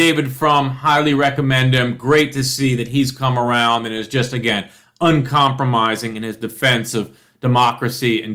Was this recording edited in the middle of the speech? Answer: no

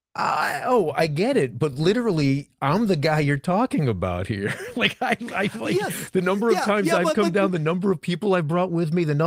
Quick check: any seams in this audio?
no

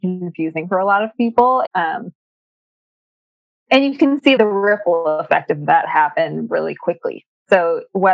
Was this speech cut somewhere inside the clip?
yes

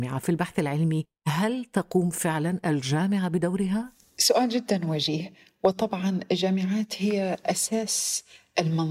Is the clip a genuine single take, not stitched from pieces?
yes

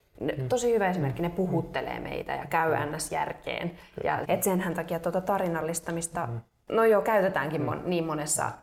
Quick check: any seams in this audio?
yes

